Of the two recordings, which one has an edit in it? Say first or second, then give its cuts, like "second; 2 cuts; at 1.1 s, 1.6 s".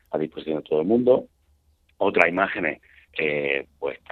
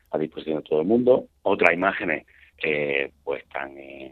second; 1 cut; at 1.4 s